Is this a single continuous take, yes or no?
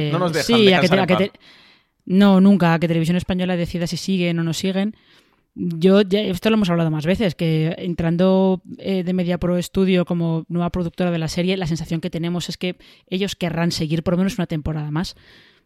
yes